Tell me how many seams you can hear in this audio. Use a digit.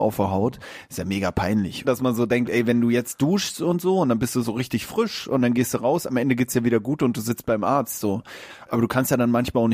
1